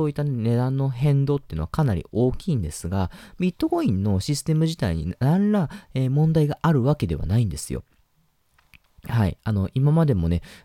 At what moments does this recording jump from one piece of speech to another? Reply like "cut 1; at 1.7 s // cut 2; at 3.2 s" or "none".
none